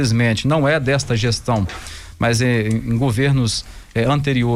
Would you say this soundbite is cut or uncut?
uncut